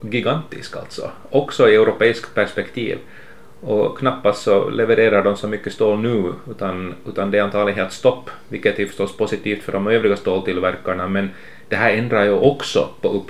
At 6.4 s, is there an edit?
no; 0 cuts

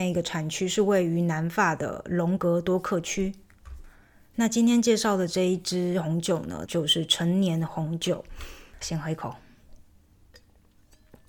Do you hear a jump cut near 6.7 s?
yes; 2 cuts; at 6.7 s, 8.8 s

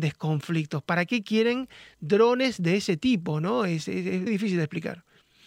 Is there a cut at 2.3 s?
no; 1 cut; at 4.3 s

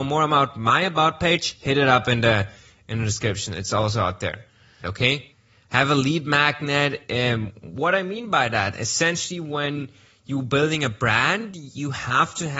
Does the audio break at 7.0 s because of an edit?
no; 1 cut; at 4.8 s

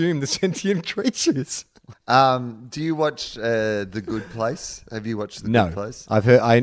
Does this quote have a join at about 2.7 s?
no; 0 cuts

